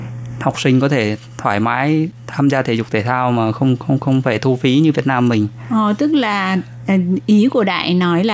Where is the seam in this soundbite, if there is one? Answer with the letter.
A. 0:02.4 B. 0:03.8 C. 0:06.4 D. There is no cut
D